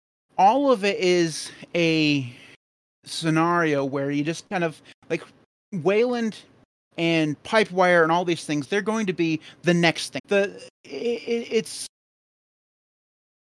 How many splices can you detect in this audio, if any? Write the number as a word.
two